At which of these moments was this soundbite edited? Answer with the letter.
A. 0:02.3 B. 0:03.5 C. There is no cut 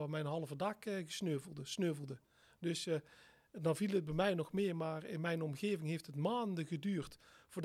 C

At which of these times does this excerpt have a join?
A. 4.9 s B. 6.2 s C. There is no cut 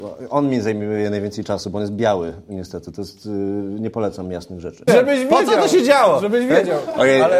A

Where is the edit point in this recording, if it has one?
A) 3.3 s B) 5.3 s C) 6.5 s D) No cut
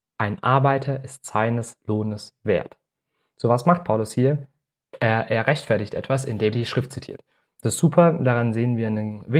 C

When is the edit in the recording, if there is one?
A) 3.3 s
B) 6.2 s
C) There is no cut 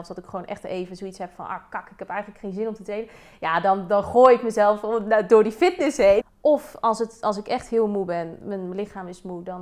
B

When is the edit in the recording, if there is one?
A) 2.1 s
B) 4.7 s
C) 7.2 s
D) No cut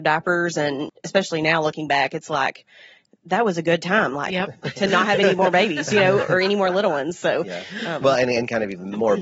D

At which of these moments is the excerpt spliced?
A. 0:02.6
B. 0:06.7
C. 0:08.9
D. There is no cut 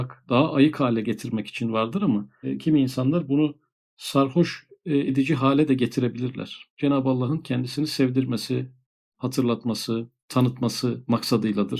B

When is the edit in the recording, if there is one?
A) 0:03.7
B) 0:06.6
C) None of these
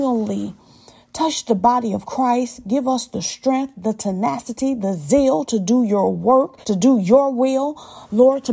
B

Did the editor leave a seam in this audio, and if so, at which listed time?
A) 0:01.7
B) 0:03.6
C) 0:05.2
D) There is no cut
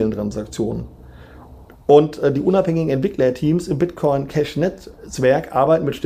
A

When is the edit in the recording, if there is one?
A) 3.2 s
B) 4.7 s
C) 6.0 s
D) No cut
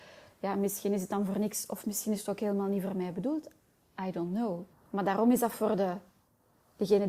B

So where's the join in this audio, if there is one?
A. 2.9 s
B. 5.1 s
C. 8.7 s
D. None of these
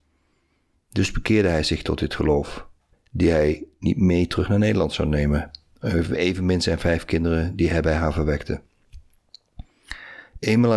A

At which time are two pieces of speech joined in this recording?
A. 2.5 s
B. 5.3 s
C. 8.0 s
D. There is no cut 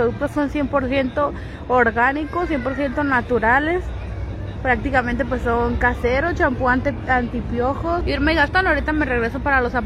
C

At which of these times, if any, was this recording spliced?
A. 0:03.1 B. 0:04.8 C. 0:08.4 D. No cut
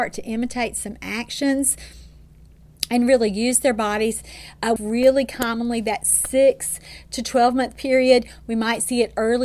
B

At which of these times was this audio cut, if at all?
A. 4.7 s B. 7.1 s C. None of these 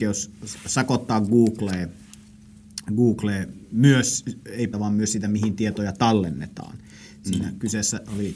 A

